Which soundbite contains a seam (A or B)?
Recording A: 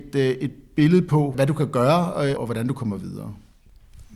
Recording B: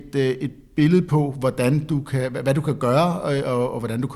A